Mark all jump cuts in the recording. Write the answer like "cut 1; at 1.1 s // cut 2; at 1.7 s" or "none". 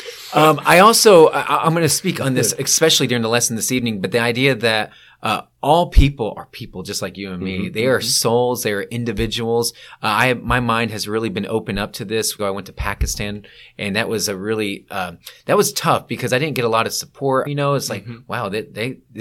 cut 1; at 12.4 s // cut 2; at 17.5 s